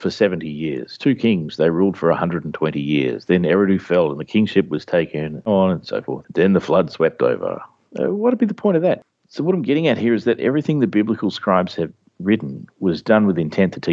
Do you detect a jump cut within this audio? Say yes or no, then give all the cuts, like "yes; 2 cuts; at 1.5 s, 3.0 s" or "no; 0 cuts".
yes; 1 cut; at 5.5 s